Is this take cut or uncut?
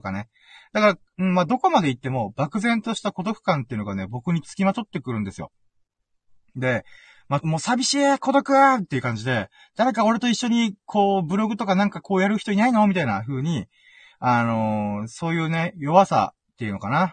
cut